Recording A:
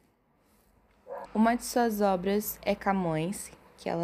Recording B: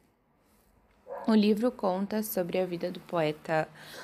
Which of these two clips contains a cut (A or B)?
A